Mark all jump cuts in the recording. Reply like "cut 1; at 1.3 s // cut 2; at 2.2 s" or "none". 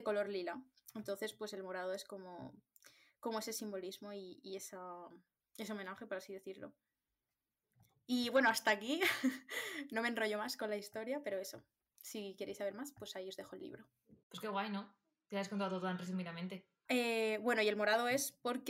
cut 1; at 14.2 s // cut 2; at 16.9 s